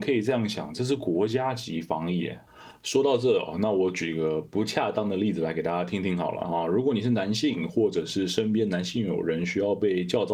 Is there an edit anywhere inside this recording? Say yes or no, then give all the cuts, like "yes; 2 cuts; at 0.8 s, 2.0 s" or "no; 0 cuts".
no; 0 cuts